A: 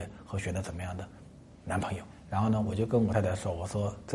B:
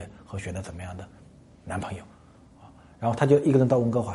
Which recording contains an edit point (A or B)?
A